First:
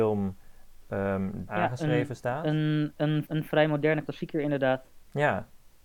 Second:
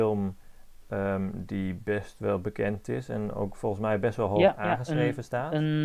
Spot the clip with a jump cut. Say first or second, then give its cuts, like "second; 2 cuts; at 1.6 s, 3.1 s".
first; 2 cuts; at 1.5 s, 3.3 s